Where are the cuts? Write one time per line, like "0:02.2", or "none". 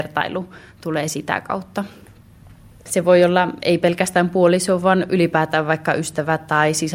0:02.9